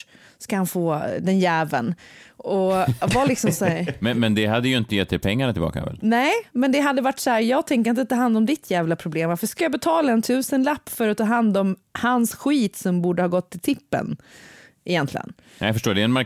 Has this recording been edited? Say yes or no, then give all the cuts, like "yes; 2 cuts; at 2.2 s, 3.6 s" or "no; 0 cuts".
no; 0 cuts